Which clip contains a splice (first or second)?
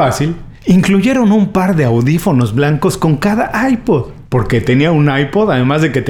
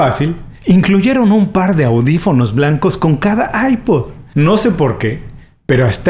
first